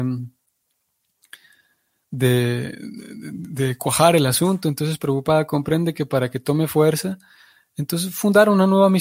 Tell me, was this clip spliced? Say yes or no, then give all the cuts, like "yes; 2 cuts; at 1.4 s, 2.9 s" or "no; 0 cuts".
no; 0 cuts